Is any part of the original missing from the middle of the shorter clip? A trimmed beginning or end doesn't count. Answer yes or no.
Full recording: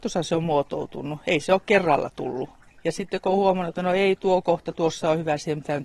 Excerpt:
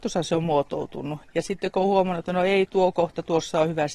yes